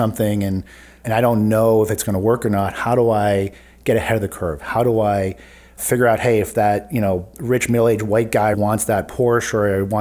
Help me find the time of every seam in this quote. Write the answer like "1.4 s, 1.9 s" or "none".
4.6 s, 8.5 s